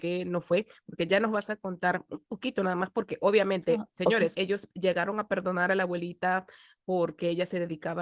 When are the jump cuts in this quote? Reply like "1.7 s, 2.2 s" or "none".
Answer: 4.3 s